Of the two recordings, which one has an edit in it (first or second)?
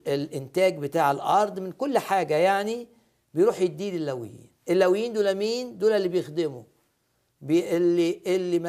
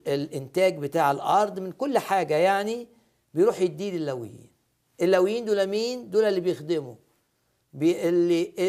first